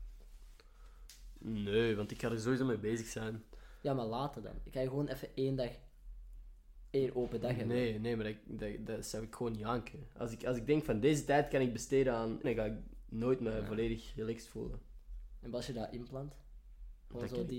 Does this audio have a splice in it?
yes; 1 cut; at 12.4 s

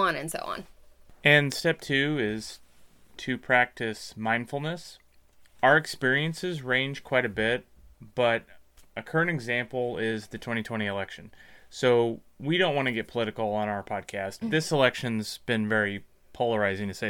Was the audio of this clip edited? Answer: yes; 1 cut; at 14.4 s

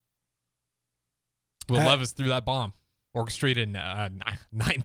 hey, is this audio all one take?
yes; 0 cuts

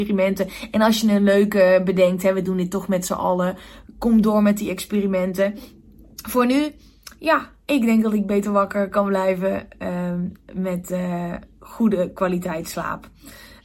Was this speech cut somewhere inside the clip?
no; 0 cuts

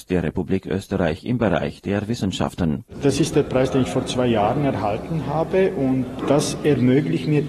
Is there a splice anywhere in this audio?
no; 0 cuts

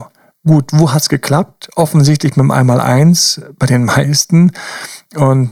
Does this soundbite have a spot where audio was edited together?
no; 0 cuts

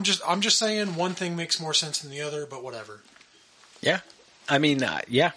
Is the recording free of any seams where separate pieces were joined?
yes; 0 cuts

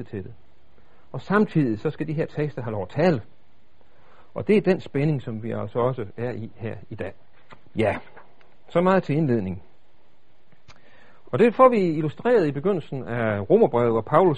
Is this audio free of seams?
no; 1 cut; at 11.2 s

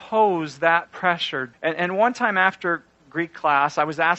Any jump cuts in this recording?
yes; 1 cut; at 1.5 s

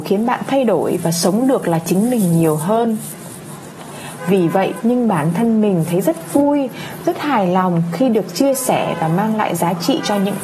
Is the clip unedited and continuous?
no; 1 cut; at 4.8 s

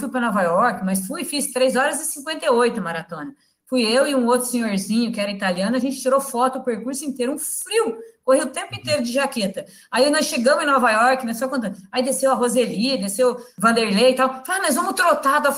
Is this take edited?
no; 0 cuts

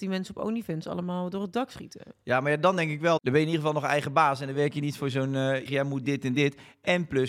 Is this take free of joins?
no; 1 cut; at 5.7 s

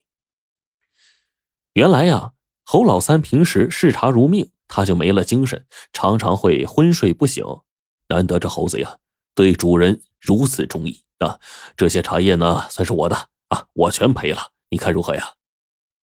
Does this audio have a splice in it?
yes; 2 cuts; at 4.6 s, 8.0 s

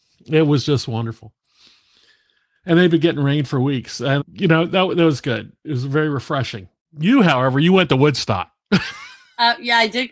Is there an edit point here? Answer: yes; 1 cut; at 4.2 s

